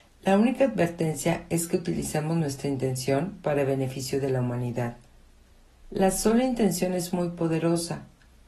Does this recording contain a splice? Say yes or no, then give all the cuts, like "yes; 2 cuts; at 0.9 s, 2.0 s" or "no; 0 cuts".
yes; 1 cut; at 5.8 s